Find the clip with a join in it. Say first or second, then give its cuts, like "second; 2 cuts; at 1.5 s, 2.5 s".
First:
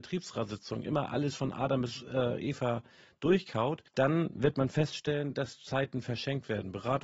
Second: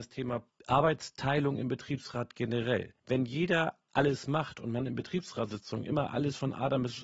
first; 1 cut; at 3.9 s